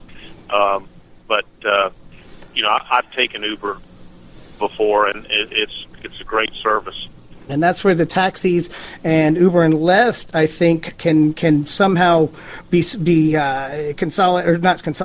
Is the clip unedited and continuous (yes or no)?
no